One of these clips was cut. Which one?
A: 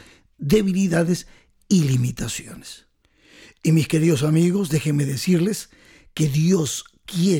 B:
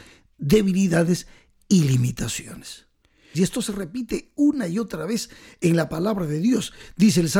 B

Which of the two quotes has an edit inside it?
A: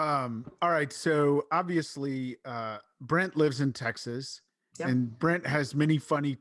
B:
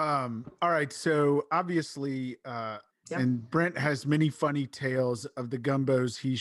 B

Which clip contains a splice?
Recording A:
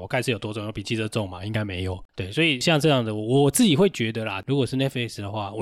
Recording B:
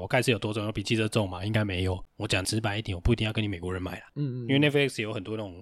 B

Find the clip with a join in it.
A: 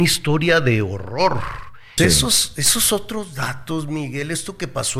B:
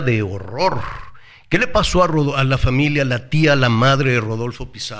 A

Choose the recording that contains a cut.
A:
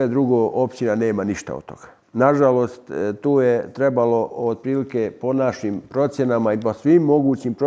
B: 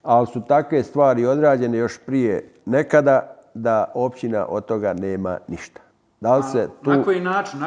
A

